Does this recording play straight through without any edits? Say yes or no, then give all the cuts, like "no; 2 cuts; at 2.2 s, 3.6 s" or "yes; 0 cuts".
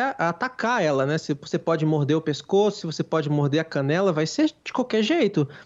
yes; 0 cuts